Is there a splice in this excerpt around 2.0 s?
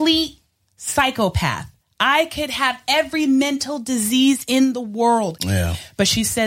no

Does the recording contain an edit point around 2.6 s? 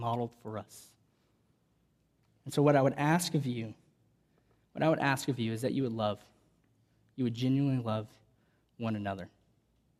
no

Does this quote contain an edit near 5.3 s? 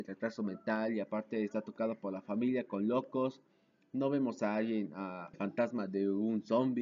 yes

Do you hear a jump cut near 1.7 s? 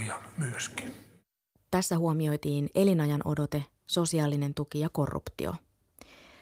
yes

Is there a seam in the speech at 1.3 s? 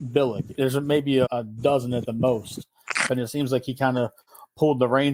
yes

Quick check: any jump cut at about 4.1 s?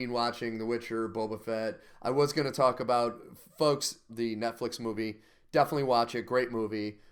yes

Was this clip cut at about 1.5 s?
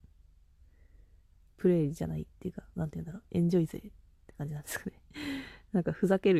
no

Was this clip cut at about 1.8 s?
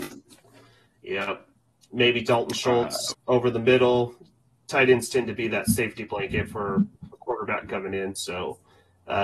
no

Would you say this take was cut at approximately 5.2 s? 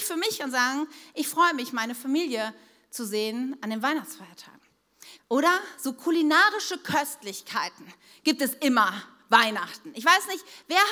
yes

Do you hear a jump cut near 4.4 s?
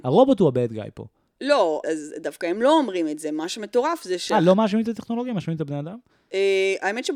no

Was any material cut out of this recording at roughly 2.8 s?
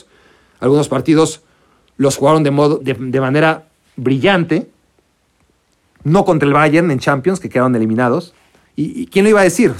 yes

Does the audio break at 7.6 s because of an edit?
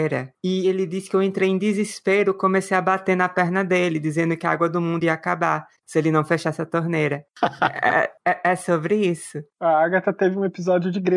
no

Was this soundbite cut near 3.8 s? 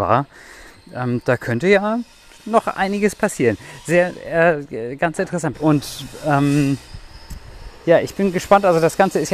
no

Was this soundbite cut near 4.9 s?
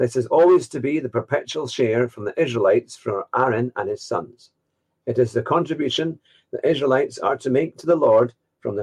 no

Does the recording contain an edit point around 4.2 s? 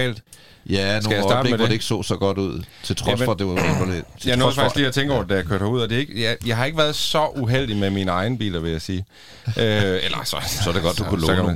no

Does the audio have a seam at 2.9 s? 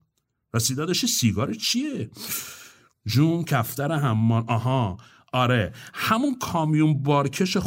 yes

